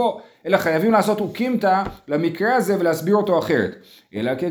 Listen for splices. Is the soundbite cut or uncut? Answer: uncut